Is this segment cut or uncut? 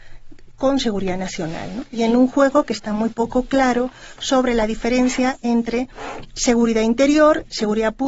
uncut